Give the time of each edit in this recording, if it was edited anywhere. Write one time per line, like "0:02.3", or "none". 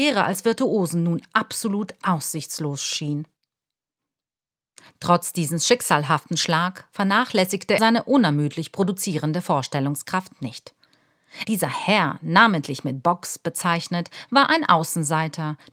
0:07.8
0:11.4